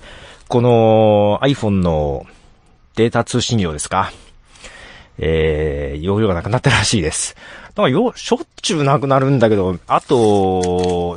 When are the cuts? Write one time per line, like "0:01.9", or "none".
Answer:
0:09.9